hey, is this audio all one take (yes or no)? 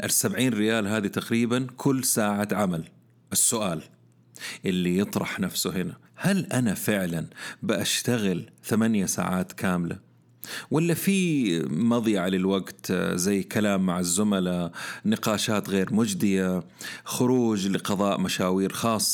no